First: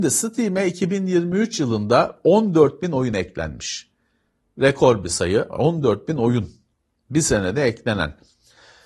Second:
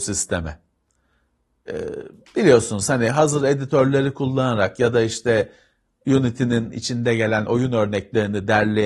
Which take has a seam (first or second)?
second